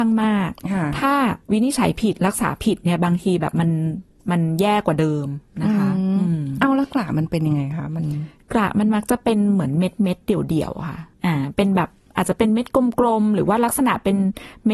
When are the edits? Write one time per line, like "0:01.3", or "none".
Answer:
0:01.4
0:11.1